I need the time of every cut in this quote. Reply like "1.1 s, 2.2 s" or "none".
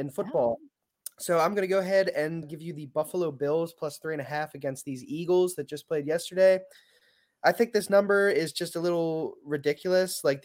2.4 s